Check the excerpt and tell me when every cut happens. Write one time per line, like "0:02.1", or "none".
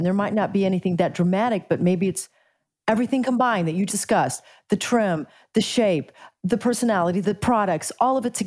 0:03.9
0:07.2